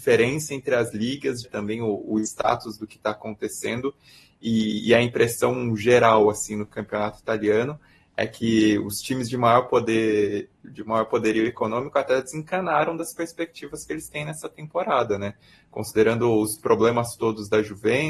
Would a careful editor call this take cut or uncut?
cut